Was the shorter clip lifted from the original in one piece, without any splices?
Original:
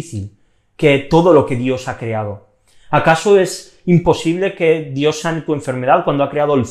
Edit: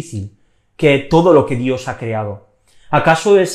yes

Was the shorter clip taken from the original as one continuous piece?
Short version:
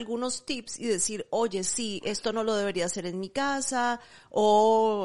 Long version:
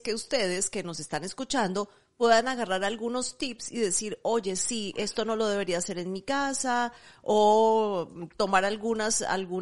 yes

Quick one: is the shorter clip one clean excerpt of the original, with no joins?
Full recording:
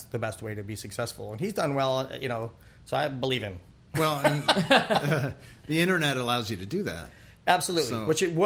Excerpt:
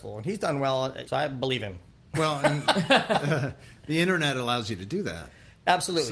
no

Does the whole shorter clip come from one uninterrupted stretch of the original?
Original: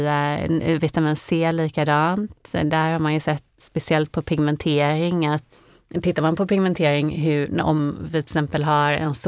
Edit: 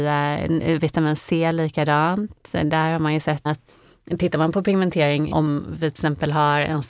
no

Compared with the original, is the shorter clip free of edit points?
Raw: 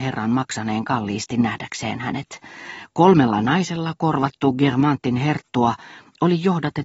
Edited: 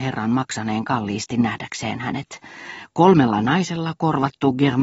yes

